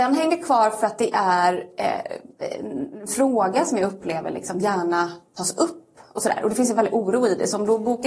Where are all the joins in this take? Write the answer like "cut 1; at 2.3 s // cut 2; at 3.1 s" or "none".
none